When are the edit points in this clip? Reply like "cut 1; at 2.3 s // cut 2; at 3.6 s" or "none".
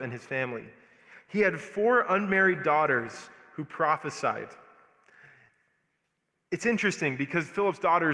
none

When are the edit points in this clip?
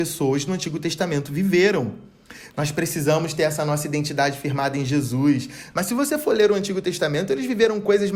cut 1; at 5.7 s

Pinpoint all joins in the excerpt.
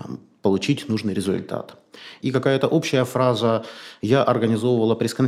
cut 1; at 2.2 s

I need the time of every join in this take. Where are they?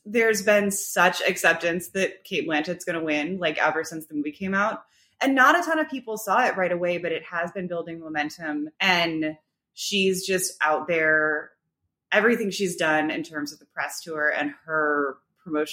cut 1; at 8.7 s

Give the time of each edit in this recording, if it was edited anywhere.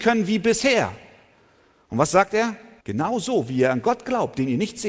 cut 1; at 2.8 s

